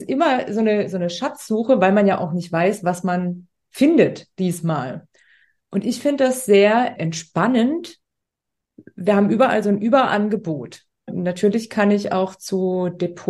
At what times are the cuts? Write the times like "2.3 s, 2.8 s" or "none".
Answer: 7.0 s, 11.1 s